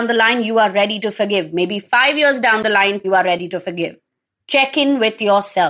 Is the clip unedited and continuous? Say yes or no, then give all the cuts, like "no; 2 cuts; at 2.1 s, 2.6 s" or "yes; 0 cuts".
no; 1 cut; at 3.0 s